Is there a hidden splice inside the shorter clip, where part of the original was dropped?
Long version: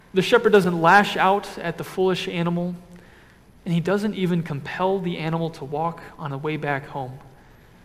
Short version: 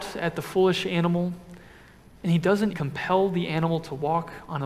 yes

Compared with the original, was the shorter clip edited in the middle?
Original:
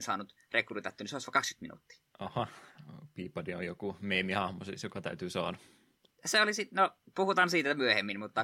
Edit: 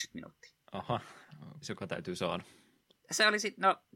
yes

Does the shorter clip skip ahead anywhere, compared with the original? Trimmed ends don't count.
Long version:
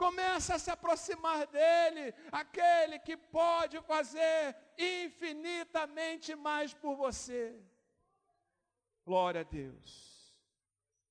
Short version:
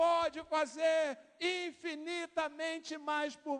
no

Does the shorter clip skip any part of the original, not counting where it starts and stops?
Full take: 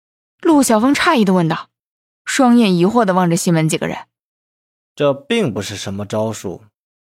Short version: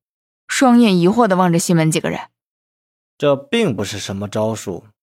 no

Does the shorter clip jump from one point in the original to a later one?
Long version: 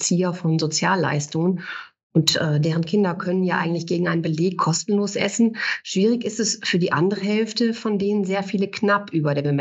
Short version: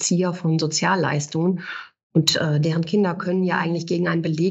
no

